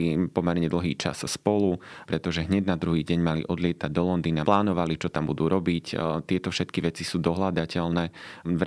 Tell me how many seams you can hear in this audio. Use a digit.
2